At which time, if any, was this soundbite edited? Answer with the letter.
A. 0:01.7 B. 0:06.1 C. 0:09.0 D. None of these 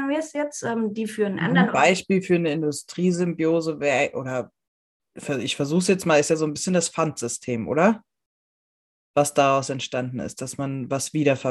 A